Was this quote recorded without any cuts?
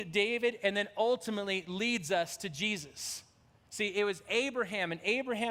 no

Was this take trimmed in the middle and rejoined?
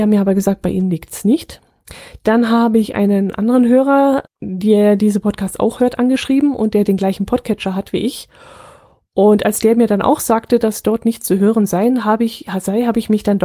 yes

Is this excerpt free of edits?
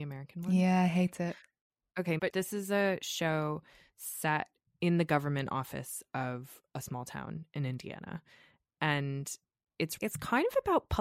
no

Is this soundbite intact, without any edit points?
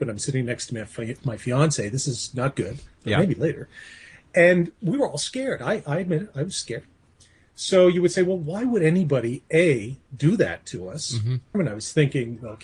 no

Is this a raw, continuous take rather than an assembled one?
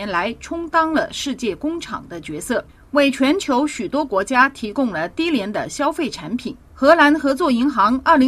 no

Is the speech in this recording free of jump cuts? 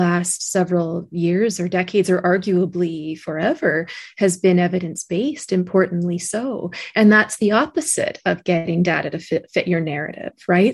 yes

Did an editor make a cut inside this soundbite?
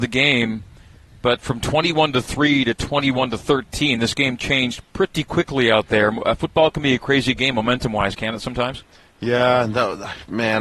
no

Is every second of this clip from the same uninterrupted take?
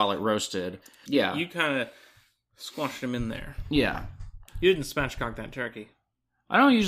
no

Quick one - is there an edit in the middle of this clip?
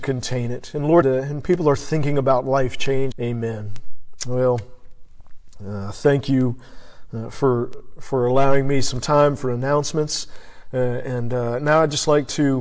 yes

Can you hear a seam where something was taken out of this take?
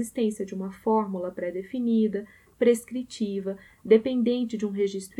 no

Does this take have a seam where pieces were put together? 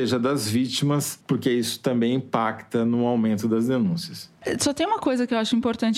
yes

